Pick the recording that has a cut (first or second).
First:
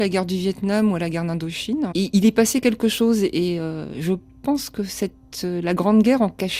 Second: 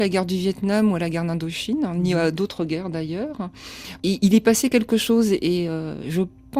first